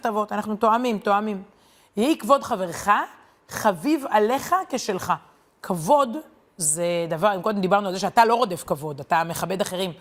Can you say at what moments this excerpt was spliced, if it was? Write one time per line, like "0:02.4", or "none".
none